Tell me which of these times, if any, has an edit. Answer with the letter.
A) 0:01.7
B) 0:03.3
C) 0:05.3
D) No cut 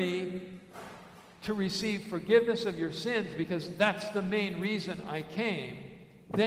D